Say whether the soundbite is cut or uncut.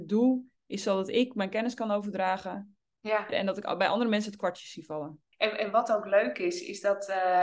cut